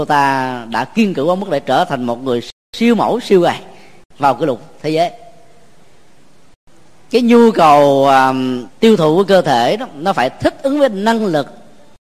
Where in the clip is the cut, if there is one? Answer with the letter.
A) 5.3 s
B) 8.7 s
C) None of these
B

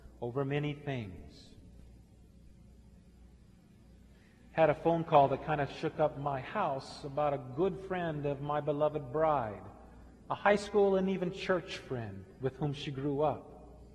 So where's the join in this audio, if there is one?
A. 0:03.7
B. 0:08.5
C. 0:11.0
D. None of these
D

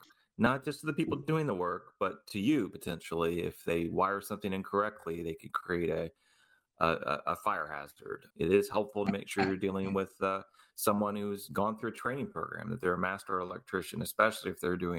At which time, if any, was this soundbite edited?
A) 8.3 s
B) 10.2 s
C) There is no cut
A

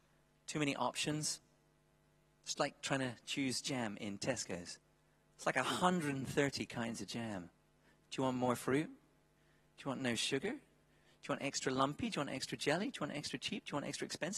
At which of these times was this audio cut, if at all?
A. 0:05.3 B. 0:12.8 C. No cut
A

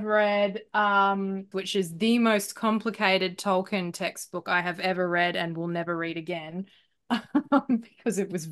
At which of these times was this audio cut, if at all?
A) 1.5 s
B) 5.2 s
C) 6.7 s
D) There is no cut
A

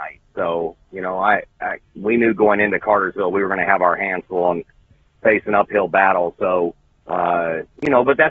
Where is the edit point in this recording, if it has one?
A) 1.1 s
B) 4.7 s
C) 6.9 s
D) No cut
D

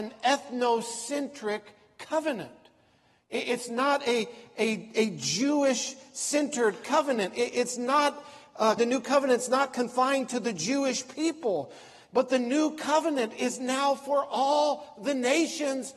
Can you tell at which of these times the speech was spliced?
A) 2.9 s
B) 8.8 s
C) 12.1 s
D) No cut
B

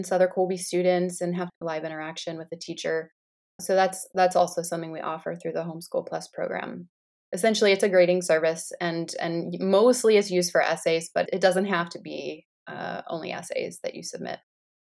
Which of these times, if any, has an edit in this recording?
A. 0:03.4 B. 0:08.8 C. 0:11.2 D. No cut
C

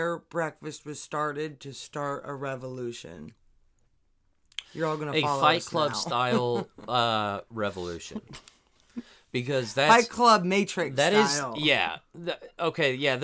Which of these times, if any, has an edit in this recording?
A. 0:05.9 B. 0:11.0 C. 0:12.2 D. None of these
D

